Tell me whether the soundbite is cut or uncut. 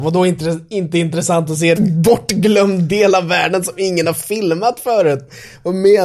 cut